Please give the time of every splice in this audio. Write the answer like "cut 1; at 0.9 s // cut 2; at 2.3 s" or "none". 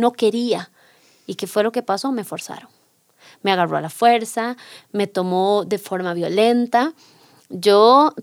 none